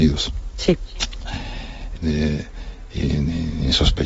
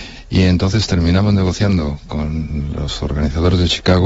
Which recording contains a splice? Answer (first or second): first